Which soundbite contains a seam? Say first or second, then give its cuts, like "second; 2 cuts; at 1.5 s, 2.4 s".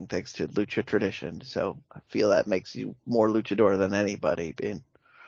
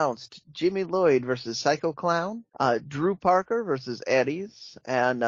second; 1 cut; at 2.5 s